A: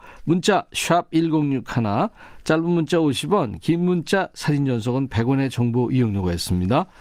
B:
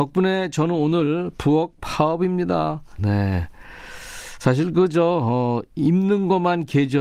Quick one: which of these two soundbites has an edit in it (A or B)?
B